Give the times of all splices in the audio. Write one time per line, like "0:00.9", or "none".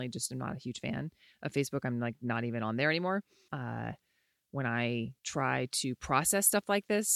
0:03.5
0:05.2